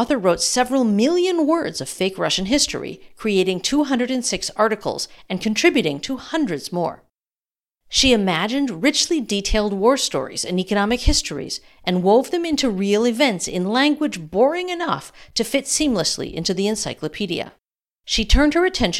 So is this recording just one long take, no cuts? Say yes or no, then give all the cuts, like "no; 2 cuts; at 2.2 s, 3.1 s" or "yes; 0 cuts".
no; 1 cut; at 18.0 s